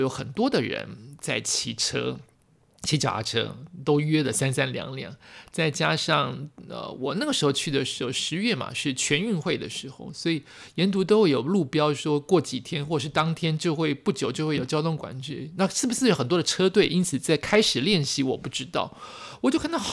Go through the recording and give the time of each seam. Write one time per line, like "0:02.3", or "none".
none